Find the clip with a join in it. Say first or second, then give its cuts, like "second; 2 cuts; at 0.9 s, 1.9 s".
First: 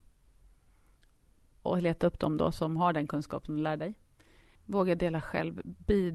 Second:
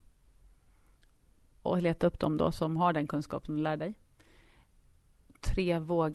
first; 1 cut; at 4.5 s